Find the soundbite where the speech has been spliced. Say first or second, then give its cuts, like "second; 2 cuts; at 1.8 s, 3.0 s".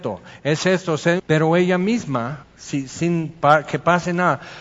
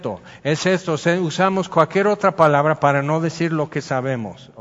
first; 2 cuts; at 1.2 s, 2.4 s